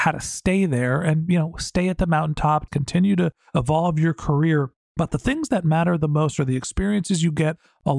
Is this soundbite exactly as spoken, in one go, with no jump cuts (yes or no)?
no